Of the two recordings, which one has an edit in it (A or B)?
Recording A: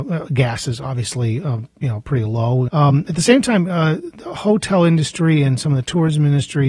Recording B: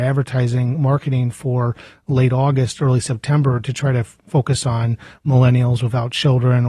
A